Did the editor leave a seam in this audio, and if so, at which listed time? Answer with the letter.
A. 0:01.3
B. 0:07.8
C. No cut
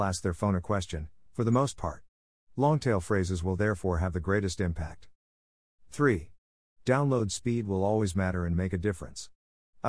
A